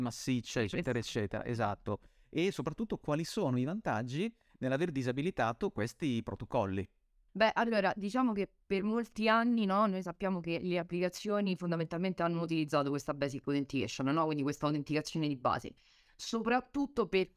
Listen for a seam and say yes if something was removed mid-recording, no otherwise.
yes